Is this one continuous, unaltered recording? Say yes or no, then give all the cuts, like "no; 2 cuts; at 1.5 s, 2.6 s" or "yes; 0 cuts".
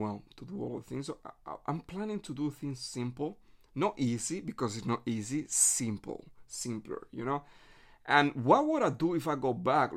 yes; 0 cuts